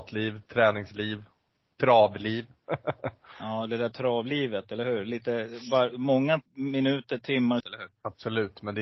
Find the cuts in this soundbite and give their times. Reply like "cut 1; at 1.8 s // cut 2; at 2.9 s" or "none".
cut 1; at 6.5 s // cut 2; at 7.6 s